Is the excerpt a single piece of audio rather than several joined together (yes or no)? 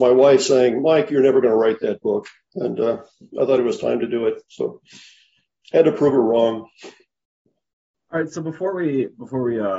yes